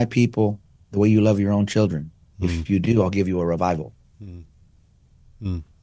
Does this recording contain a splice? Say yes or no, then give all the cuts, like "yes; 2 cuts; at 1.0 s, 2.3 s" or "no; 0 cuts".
no; 0 cuts